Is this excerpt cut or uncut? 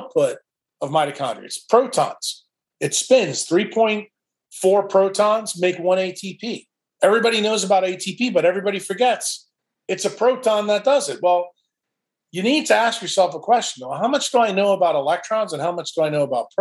uncut